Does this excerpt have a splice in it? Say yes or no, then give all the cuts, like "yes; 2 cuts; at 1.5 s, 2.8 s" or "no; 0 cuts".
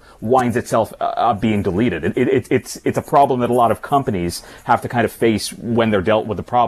no; 0 cuts